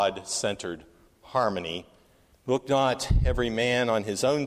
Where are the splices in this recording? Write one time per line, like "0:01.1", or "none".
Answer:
0:02.3